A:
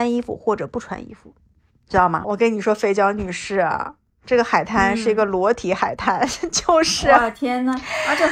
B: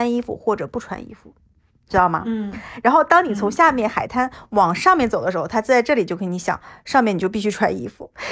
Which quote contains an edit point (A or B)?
A